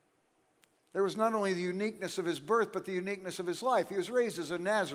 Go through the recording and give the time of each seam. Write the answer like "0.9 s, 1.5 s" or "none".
none